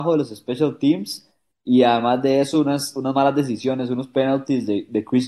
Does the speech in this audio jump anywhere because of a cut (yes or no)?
no